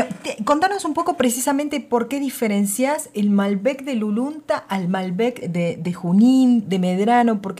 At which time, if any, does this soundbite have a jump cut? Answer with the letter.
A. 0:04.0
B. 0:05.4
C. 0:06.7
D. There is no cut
B